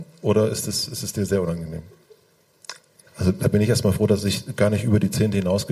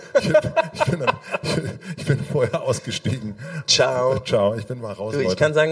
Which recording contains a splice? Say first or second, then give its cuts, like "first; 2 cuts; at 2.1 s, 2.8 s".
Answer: first; 1 cut; at 3.1 s